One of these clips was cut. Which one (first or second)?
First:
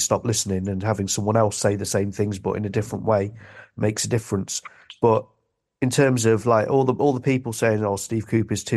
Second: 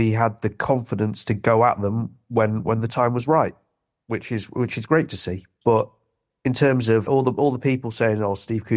second